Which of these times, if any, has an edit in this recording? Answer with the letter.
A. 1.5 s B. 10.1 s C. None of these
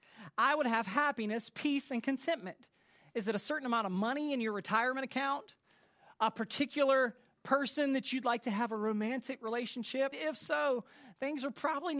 B